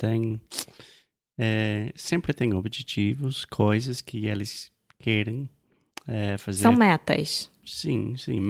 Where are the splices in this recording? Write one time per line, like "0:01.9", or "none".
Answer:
none